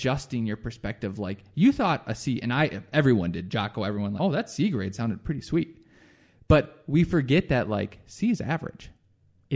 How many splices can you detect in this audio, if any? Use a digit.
1